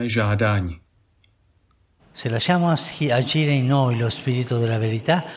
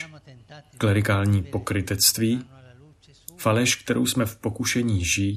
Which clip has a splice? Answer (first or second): first